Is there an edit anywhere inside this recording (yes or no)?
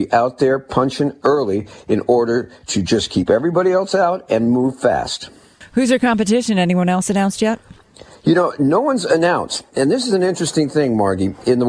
no